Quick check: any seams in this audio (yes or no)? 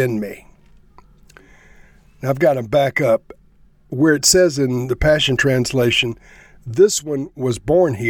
no